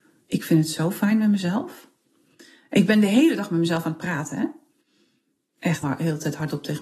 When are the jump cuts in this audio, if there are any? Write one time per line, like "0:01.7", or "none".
0:05.8